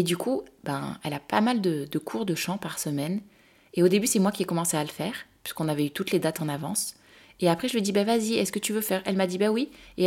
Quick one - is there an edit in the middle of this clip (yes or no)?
no